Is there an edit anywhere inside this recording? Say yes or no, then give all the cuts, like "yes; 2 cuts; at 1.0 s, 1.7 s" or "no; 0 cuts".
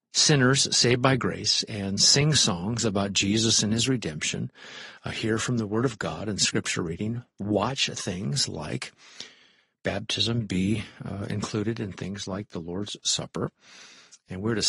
no; 0 cuts